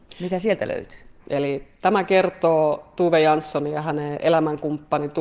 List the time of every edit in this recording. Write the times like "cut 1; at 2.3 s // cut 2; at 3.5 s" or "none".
cut 1; at 1.2 s